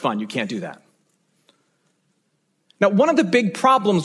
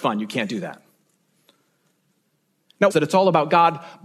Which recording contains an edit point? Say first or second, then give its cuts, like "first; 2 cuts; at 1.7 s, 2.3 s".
second; 1 cut; at 2.9 s